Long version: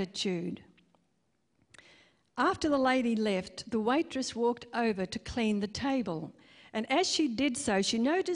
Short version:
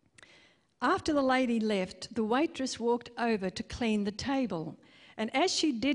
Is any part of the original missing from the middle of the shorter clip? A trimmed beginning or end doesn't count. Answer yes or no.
no